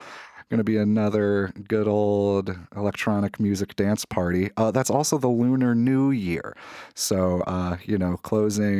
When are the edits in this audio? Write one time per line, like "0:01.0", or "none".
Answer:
none